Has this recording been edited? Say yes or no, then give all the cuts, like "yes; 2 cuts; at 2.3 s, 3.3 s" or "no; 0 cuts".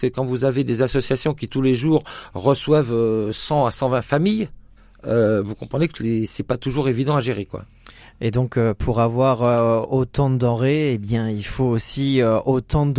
no; 0 cuts